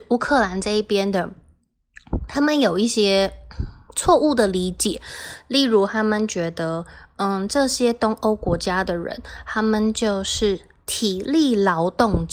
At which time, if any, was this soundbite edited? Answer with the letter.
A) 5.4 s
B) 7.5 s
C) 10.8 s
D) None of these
D